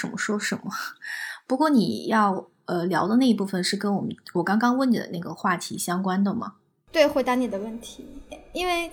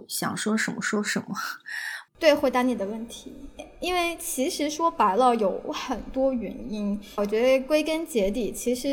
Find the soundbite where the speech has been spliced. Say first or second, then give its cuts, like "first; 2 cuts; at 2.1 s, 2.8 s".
second; 2 cuts; at 2.1 s, 7.2 s